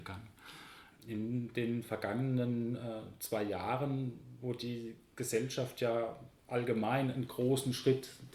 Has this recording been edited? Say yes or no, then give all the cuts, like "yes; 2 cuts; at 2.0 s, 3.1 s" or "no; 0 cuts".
yes; 1 cut; at 0.9 s